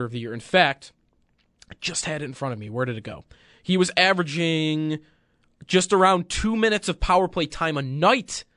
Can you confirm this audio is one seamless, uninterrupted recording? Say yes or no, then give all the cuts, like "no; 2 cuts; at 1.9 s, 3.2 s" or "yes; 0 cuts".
yes; 0 cuts